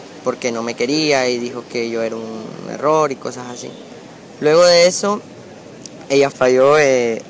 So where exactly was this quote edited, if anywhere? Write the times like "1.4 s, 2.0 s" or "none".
4.4 s, 6.3 s

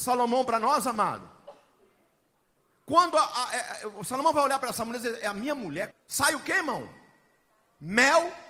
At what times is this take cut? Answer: 5.9 s

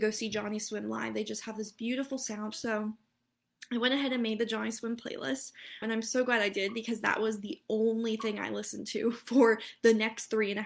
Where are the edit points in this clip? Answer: 2.5 s, 5.8 s

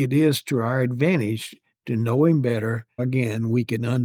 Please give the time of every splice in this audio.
3.0 s

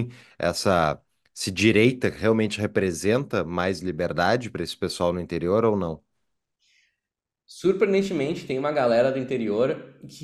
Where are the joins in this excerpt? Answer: none

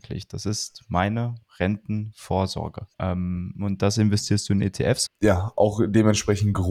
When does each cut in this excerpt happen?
2.9 s, 5.1 s

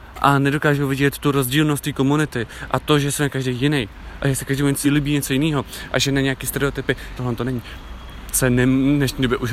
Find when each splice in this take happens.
4.8 s, 7.2 s

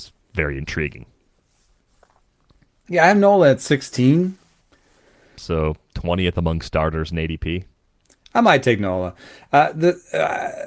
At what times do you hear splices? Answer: 5.4 s

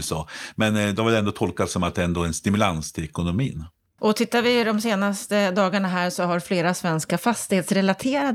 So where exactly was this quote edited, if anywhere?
4.0 s

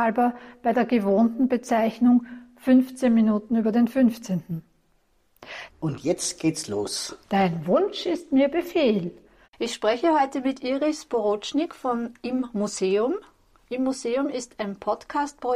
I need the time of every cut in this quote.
5.7 s, 9.4 s

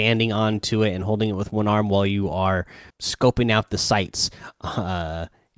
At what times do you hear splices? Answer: 2.9 s

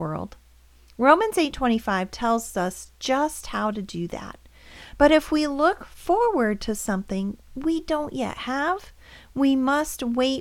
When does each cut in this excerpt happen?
none

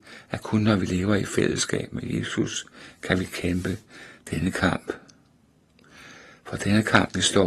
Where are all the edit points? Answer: none

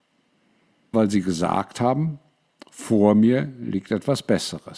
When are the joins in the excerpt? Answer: 0.9 s

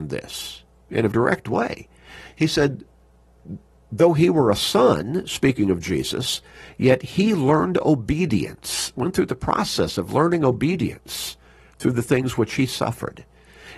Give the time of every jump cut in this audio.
1.1 s

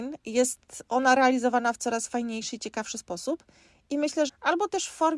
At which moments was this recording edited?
4.3 s

